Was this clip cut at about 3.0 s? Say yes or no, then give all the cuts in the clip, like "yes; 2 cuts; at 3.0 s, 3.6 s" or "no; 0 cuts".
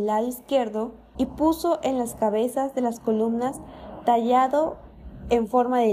no; 1 cut; at 1.2 s